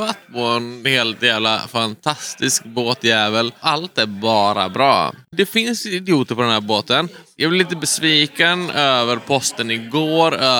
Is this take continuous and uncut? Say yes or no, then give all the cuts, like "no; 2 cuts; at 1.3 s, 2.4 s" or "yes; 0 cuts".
yes; 0 cuts